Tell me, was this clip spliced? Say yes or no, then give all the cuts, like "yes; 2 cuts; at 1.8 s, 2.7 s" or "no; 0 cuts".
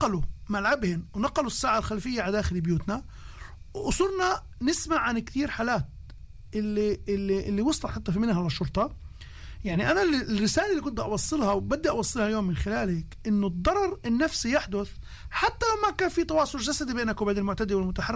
no; 0 cuts